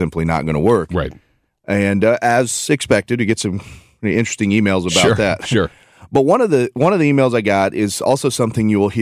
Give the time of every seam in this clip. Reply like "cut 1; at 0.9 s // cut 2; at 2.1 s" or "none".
none